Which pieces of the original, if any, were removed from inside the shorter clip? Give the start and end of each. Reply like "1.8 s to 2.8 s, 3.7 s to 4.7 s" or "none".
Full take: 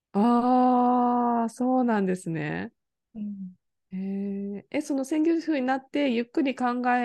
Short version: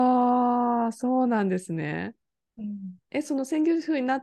3.7 s to 4.7 s